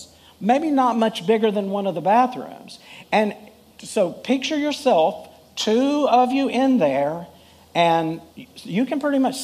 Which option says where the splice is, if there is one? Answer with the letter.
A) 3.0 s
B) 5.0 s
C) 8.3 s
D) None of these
C